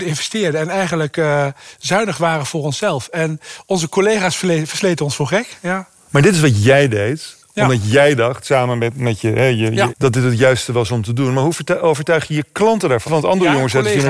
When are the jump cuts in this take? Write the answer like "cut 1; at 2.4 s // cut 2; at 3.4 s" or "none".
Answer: cut 1; at 9.9 s // cut 2; at 13.0 s